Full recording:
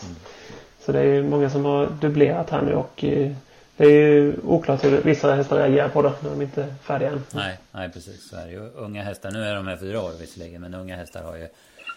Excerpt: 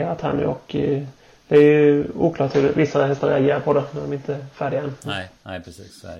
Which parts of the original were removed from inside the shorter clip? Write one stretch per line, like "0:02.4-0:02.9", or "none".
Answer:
none